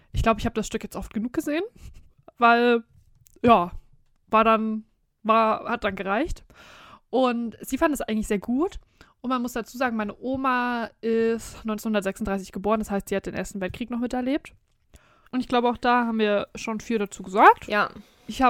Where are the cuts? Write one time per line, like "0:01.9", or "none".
0:15.3